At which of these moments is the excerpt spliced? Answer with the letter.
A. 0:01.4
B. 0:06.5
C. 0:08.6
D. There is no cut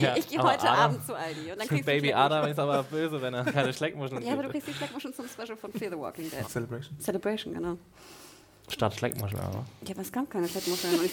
B